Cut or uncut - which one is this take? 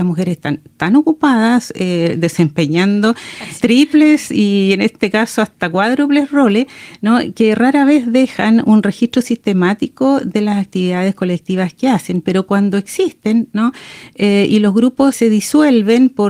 cut